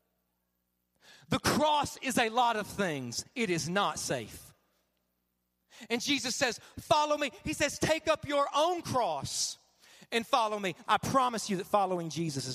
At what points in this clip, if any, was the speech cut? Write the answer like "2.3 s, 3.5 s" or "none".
10.8 s